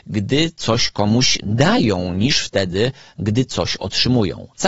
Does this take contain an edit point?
no; 0 cuts

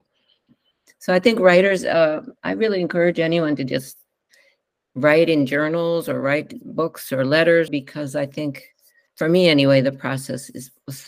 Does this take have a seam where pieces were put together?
yes; 1 cut; at 7.7 s

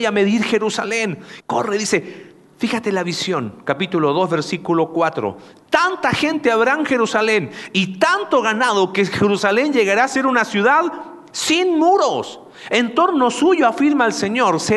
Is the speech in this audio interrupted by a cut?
yes; 1 cut; at 1.4 s

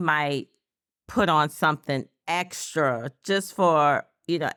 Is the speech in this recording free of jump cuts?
yes; 0 cuts

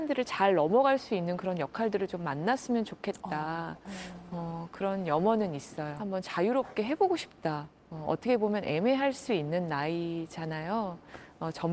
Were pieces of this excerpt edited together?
yes; 2 cuts; at 6.0 s, 7.8 s

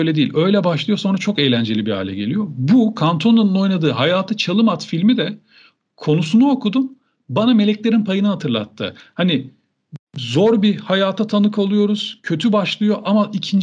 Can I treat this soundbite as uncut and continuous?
yes; 0 cuts

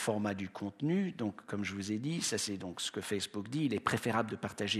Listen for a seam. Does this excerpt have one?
no; 0 cuts

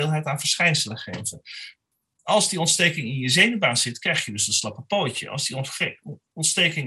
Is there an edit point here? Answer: no; 0 cuts

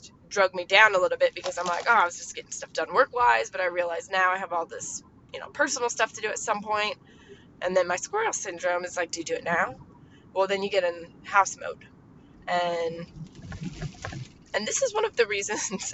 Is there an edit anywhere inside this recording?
no; 0 cuts

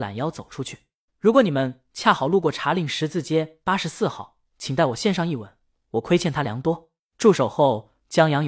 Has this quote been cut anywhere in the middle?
yes; 1 cut; at 1.1 s

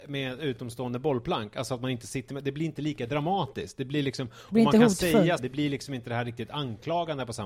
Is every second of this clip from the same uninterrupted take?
no; 1 cut; at 5.4 s

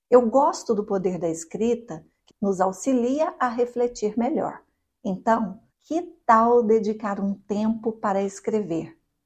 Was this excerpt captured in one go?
no; 2 cuts; at 2.3 s, 5.7 s

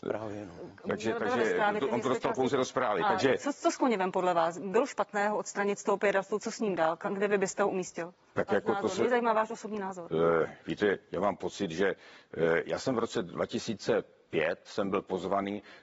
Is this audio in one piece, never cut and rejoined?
yes; 0 cuts

